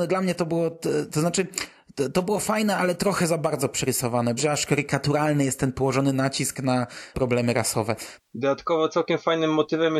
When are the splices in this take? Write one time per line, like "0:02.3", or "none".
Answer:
0:04.4
0:08.2